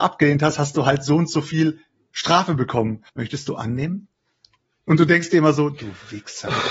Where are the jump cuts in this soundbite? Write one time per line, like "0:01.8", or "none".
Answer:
0:03.1

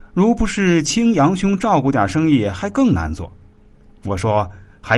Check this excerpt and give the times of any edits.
none

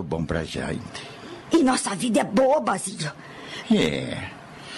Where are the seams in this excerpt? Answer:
0:01.5
0:03.6

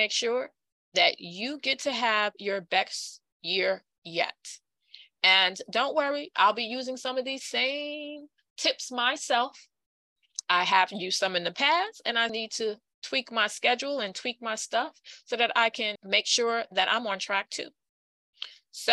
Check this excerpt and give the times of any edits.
0:12.3
0:16.0

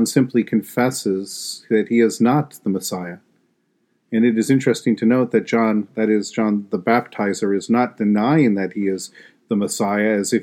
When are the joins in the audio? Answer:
none

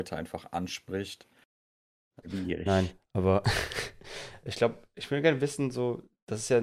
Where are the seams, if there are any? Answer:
0:02.2

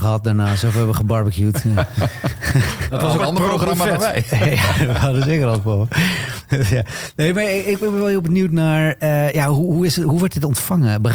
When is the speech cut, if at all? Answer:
0:03.2

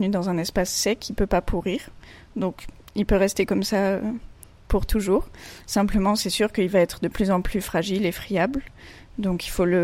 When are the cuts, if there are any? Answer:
none

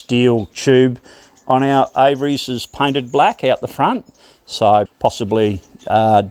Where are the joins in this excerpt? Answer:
0:04.9

